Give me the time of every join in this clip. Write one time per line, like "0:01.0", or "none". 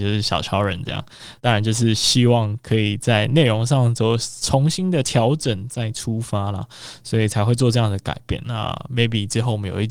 0:01.4
0:08.4